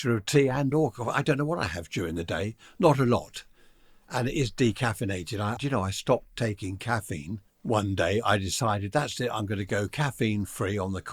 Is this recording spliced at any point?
yes; 2 cuts; at 5.6 s, 7.5 s

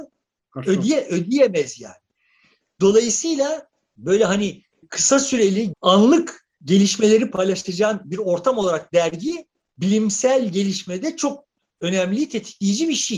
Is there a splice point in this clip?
yes; 1 cut; at 5.7 s

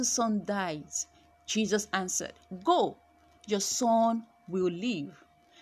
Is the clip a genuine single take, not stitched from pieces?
yes; 0 cuts

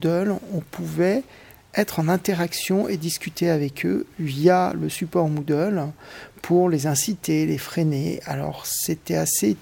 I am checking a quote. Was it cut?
no; 0 cuts

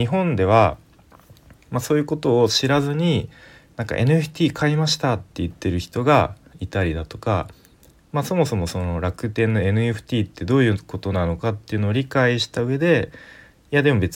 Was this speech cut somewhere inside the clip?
no; 0 cuts

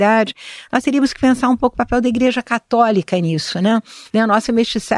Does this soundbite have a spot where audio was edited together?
yes; 1 cut; at 4.0 s

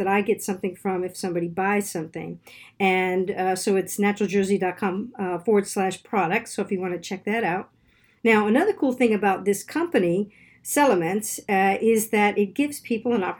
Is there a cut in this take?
no; 0 cuts

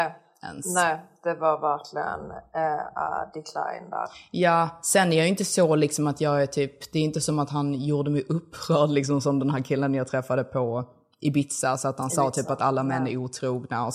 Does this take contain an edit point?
no; 0 cuts

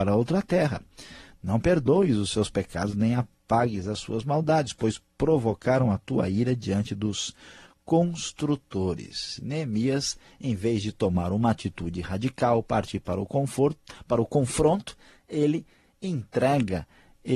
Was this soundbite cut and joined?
no; 0 cuts

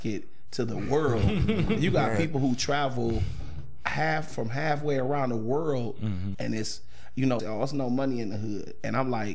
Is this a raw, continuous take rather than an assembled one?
no; 2 cuts; at 6.3 s, 7.4 s

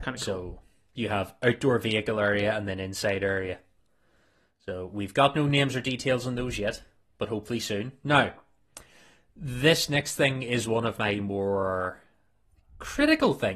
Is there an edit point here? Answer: no; 0 cuts

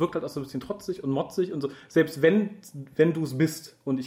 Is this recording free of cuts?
yes; 0 cuts

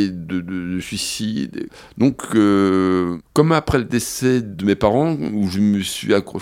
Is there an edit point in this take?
no; 0 cuts

